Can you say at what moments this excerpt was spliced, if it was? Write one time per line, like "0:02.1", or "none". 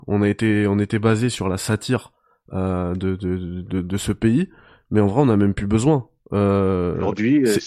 none